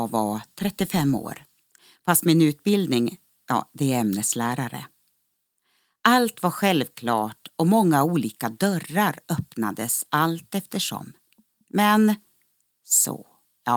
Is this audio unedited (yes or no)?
yes